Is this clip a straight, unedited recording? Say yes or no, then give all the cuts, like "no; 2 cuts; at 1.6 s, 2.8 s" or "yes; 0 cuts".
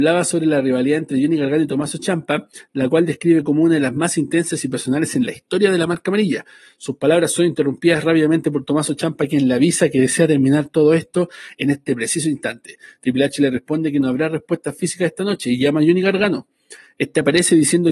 yes; 0 cuts